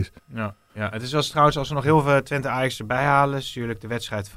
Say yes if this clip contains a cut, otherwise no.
no